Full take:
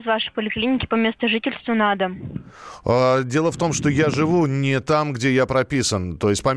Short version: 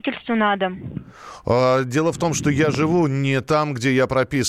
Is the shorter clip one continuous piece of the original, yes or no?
yes